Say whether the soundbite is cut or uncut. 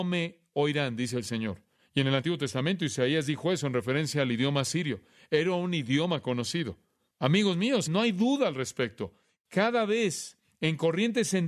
cut